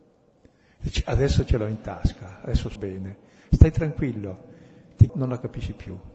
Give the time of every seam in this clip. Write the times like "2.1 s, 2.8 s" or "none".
2.8 s, 5.1 s